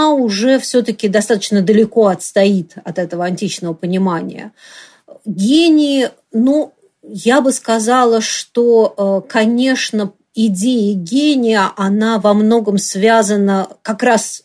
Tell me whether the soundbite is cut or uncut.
uncut